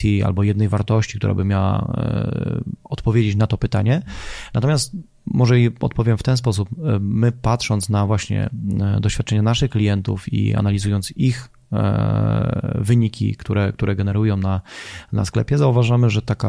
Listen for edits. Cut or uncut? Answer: uncut